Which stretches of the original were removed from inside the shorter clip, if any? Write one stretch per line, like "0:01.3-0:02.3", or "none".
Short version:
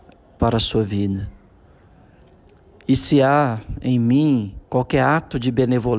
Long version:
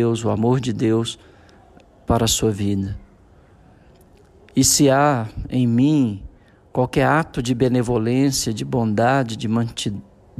0:06.3-0:06.7